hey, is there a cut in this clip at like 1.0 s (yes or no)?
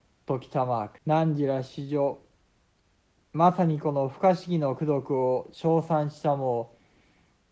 yes